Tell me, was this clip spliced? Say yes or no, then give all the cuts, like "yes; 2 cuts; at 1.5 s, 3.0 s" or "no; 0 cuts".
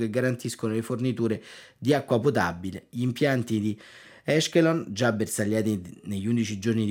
no; 0 cuts